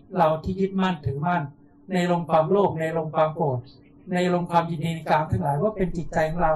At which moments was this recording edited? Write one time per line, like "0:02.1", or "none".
none